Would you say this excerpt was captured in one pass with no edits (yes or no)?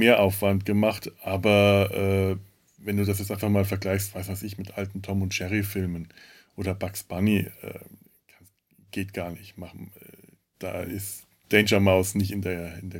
yes